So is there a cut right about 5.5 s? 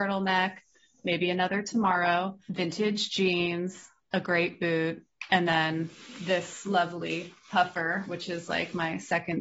no; 0 cuts

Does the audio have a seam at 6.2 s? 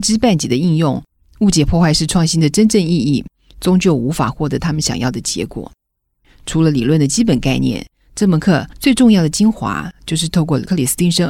yes; 1 cut; at 6.2 s

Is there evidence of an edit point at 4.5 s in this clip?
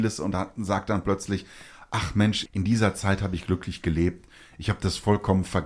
no; 1 cut; at 2.5 s

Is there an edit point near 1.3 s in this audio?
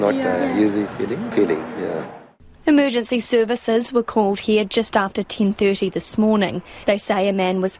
yes; 1 cut; at 1.3 s

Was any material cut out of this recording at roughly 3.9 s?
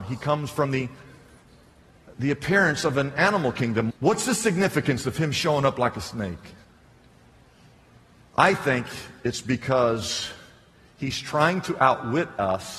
yes; 1 cut; at 3.9 s

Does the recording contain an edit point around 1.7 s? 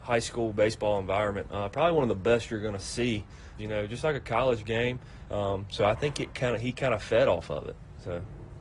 no; 2 cuts; at 3.6 s, 5.3 s

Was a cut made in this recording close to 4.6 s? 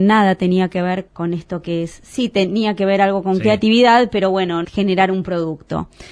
yes; 2 cuts; at 1.1 s, 4.6 s

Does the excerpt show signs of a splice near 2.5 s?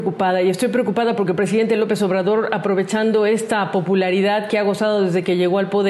no; 0 cuts

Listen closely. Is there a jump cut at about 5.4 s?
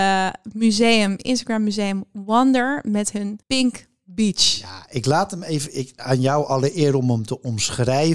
no; 1 cut; at 3.4 s

